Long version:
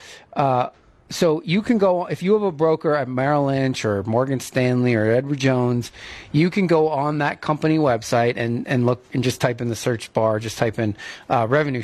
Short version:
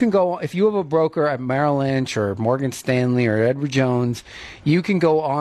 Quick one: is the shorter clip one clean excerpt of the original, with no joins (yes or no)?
yes